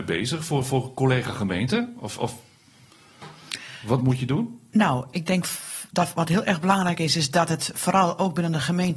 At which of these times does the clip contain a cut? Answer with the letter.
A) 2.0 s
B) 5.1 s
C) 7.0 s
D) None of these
B